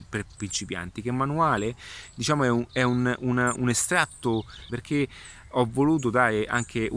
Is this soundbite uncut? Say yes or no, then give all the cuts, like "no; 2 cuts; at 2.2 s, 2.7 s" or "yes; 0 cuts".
no; 2 cuts; at 3.6 s, 4.7 s